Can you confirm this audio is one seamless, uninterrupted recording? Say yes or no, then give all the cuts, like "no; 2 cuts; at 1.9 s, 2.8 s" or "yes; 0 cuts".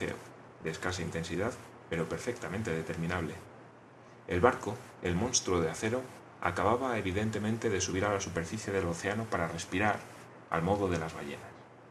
yes; 0 cuts